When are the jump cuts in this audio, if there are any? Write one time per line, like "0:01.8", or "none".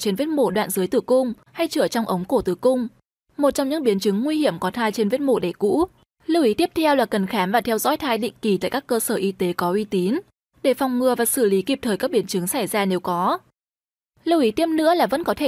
0:06.1